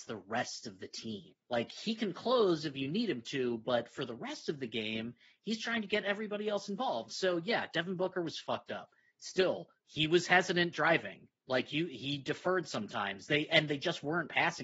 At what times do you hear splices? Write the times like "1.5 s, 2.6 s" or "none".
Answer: 1.4 s, 9.8 s